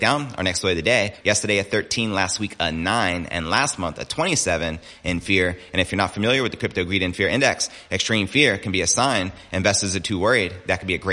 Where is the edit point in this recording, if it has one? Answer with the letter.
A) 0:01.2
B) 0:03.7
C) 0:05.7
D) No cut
A